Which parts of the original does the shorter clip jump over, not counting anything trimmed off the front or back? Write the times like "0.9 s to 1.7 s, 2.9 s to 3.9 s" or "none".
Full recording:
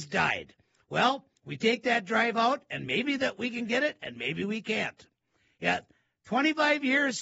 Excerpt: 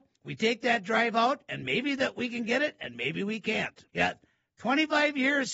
5.1 s to 5.6 s